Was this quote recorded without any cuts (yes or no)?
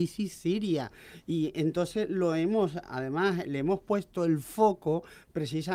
yes